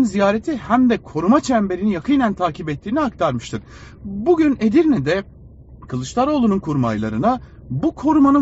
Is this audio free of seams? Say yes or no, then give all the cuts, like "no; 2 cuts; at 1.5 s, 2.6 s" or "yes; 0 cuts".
yes; 0 cuts